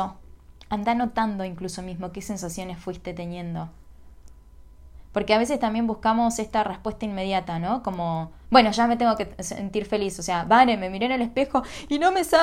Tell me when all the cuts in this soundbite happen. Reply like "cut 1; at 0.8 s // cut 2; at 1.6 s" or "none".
none

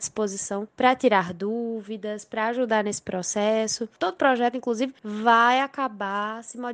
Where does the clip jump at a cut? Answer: cut 1; at 4.0 s

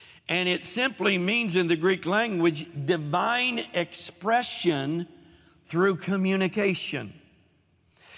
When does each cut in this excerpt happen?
none

